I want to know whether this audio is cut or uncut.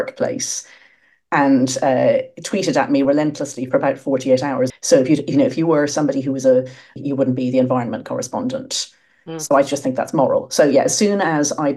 cut